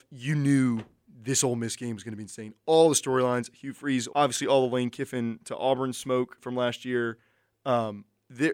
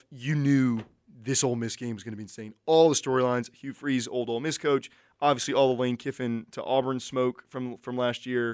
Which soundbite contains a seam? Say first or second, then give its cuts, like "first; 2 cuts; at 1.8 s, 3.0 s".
first; 2 cuts; at 4.1 s, 6.4 s